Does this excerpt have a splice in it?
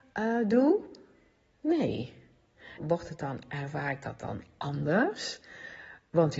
yes; 1 cut; at 2.8 s

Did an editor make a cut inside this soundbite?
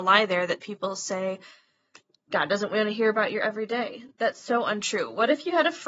no; 0 cuts

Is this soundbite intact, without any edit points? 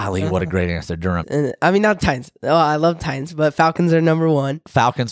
no; 1 cut; at 1.2 s

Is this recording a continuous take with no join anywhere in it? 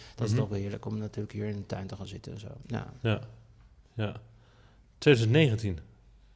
yes; 0 cuts

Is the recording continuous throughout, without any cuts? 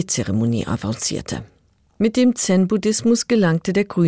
yes; 0 cuts

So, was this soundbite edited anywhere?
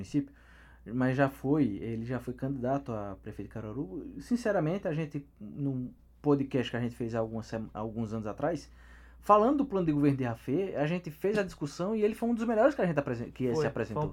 no; 0 cuts

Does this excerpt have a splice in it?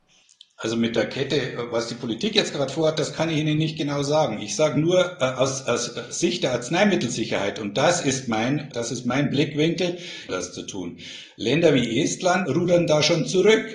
yes; 3 cuts; at 8.7 s, 10.3 s, 12.5 s

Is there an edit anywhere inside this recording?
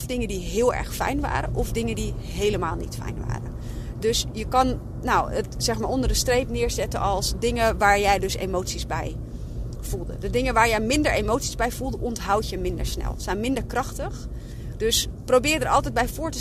no; 0 cuts

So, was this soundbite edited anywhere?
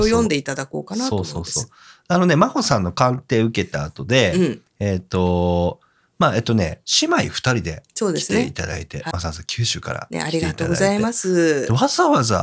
yes; 1 cut; at 9.1 s

